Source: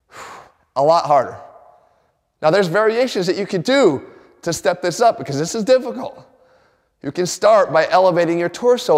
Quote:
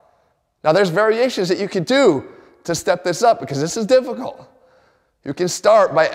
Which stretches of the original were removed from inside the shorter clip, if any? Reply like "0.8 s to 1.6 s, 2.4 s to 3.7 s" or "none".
none